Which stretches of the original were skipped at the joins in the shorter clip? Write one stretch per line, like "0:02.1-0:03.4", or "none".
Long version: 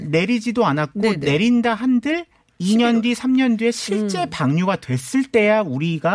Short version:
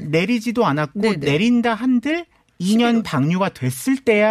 0:03.0-0:04.3